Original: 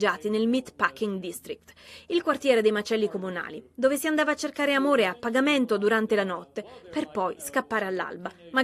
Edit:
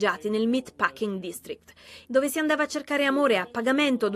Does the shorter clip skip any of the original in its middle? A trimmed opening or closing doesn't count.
yes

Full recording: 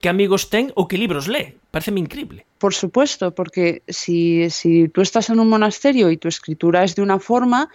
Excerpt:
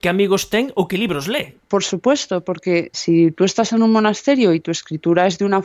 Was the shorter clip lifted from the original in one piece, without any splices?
no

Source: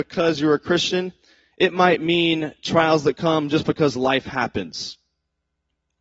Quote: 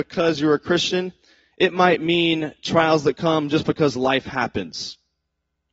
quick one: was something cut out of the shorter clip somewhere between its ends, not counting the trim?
no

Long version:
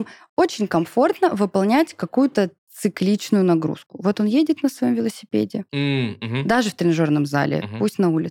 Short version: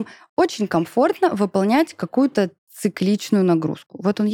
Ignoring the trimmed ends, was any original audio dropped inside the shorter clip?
no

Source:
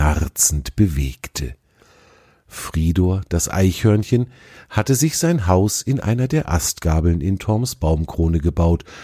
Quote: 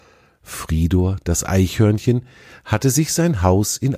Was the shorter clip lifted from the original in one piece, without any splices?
yes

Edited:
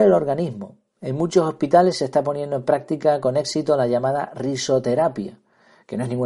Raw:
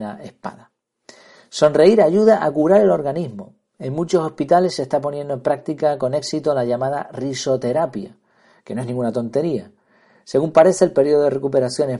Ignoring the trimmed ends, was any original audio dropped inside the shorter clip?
no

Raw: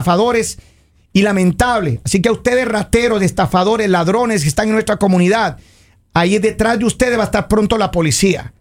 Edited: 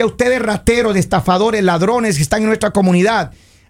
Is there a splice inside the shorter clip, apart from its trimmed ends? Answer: no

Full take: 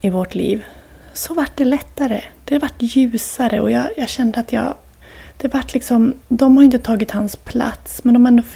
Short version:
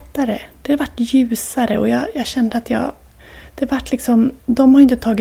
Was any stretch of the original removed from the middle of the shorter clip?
no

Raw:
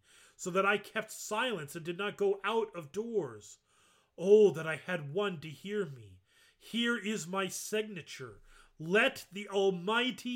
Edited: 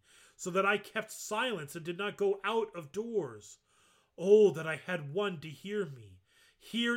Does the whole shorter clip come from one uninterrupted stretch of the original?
yes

